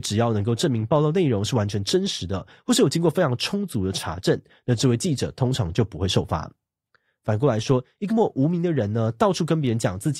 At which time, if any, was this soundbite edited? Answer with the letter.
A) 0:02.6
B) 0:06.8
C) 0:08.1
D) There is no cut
C